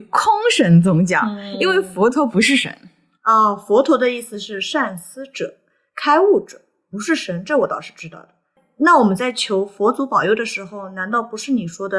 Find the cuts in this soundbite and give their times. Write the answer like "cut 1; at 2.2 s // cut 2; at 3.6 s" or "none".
none